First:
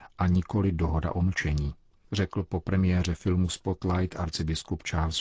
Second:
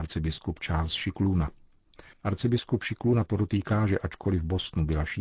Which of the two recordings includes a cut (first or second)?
second